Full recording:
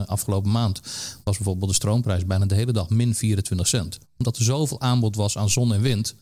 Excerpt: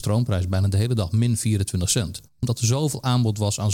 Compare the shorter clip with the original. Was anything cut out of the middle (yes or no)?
no